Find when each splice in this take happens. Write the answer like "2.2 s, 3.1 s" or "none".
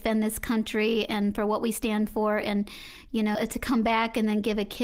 3.3 s